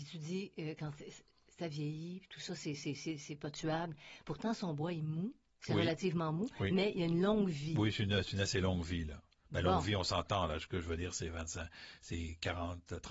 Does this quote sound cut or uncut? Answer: uncut